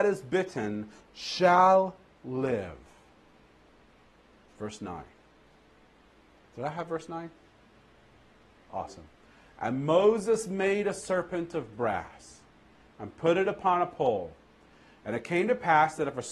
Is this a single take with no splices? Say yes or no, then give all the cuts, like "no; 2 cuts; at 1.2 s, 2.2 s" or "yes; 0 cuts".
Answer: no; 1 cut; at 1.0 s